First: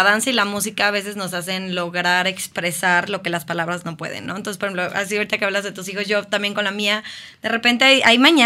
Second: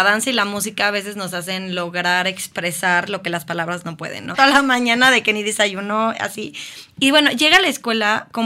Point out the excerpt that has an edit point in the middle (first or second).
second